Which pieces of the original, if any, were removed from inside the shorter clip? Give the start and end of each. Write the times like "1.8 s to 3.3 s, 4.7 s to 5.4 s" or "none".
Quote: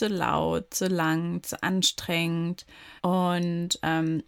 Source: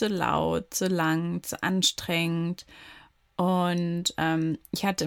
3.0 s to 3.3 s